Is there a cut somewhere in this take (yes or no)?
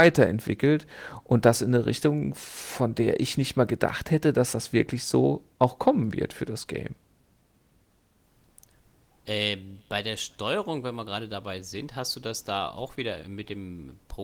yes